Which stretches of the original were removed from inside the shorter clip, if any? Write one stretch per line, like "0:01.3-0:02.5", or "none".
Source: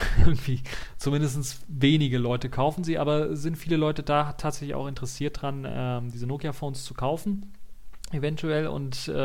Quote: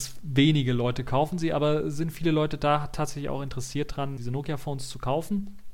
0:05.6-0:06.1